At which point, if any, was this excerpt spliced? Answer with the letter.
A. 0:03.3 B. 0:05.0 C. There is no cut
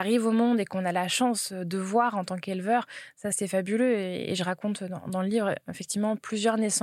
A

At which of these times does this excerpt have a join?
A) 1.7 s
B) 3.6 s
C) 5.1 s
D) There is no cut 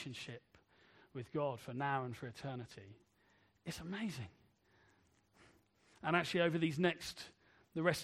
D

